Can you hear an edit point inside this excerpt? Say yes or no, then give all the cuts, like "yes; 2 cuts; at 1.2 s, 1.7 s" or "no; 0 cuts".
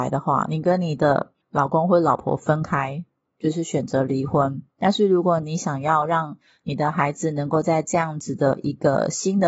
yes; 1 cut; at 4.7 s